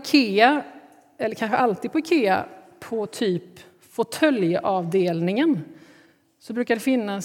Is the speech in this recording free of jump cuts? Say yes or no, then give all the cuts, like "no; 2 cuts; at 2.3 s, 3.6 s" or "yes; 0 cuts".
yes; 0 cuts